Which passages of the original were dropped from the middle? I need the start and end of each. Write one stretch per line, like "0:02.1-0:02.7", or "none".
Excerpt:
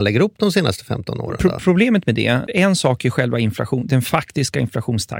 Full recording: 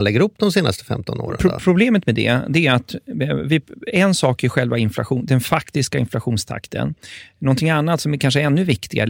0:02.5-0:03.8